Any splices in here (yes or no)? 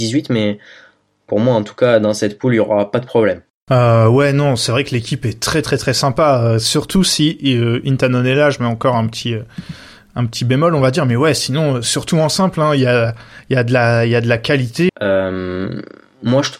yes